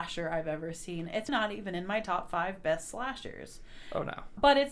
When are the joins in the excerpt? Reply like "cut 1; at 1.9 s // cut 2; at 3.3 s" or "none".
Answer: cut 1; at 1.3 s